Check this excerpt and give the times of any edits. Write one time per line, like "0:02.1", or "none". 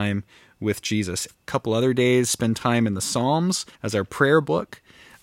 0:01.3
0:03.7